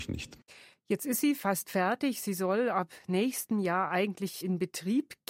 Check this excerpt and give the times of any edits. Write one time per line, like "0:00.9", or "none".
none